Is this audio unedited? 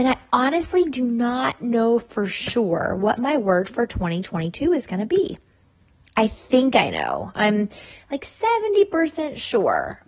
yes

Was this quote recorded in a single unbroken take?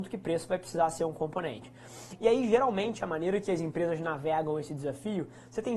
yes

